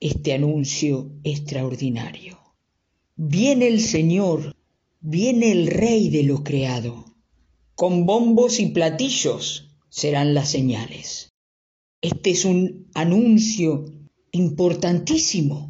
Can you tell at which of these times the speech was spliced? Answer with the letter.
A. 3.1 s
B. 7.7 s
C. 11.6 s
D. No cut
D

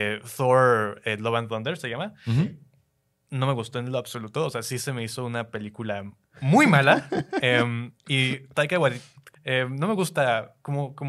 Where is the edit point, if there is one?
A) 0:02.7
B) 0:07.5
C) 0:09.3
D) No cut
C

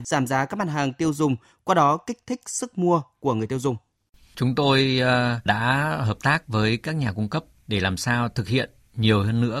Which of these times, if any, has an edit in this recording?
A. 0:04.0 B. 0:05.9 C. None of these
C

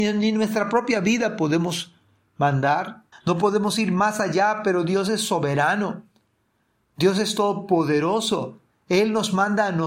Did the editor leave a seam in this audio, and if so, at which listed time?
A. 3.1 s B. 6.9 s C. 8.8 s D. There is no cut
A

